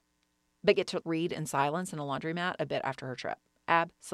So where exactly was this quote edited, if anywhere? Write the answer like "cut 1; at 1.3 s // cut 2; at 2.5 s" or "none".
cut 1; at 1.0 s

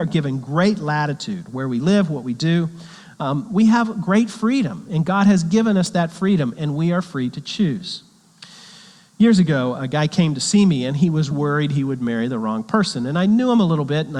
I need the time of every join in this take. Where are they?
cut 1; at 11.3 s

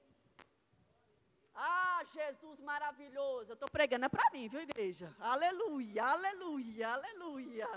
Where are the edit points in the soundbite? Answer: none

